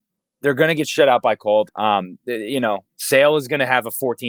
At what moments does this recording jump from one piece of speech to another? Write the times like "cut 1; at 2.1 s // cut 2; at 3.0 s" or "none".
cut 1; at 1.7 s

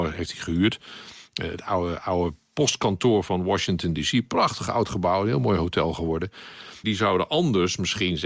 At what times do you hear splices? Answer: cut 1; at 6.8 s

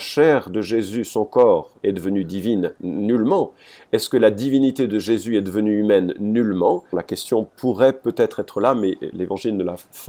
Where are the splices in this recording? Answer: cut 1; at 1.8 s // cut 2; at 6.9 s

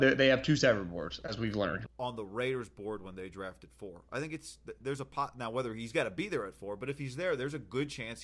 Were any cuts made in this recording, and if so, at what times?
cut 1; at 1.9 s

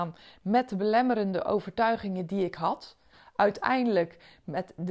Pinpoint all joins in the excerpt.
none

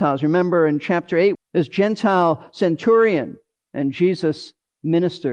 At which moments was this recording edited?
cut 1; at 1.3 s // cut 2; at 3.6 s

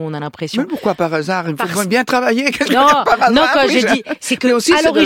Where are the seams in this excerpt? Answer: none

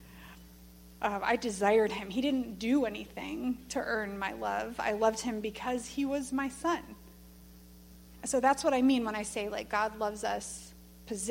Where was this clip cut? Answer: none

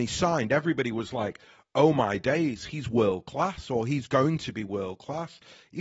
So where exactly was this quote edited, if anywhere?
none

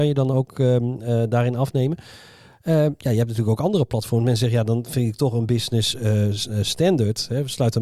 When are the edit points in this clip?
none

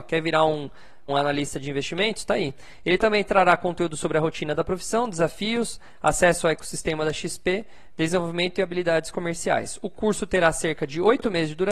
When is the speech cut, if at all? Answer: cut 1; at 1.1 s

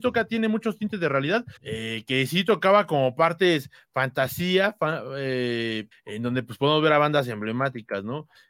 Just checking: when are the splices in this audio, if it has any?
cut 1; at 1.6 s // cut 2; at 5.9 s

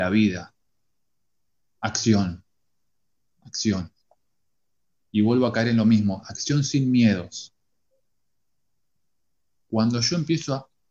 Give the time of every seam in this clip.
cut 1; at 9.6 s

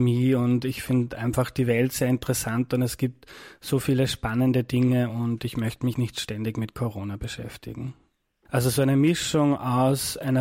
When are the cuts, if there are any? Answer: cut 1; at 5.9 s // cut 2; at 8.5 s

